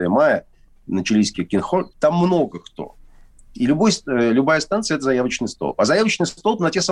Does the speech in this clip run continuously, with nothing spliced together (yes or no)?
no